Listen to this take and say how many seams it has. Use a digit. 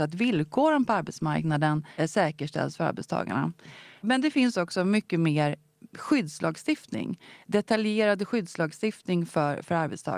1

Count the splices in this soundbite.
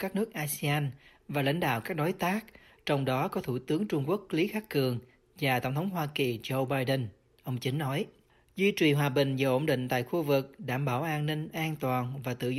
0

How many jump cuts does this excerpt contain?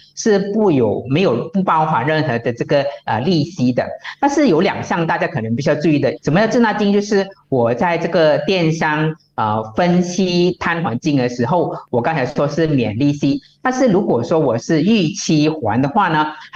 1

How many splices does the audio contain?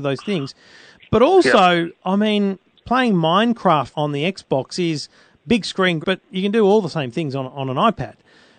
2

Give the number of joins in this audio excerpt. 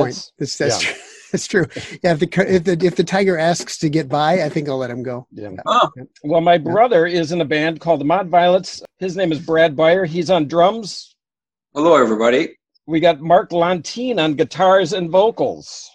1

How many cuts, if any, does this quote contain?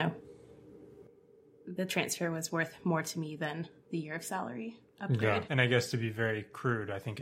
1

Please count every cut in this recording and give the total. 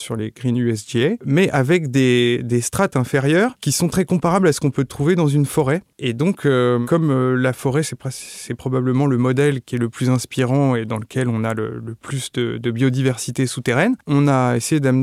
0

